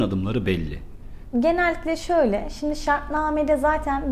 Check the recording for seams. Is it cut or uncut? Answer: cut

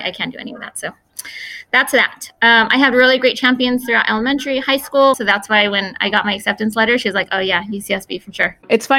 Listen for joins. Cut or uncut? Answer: cut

